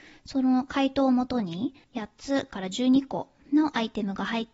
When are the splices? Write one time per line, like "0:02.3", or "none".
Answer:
0:01.8